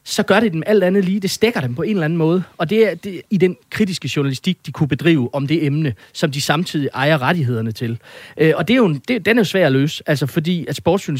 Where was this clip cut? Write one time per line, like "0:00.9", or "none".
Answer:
0:03.3